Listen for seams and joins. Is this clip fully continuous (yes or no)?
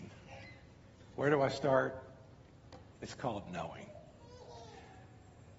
no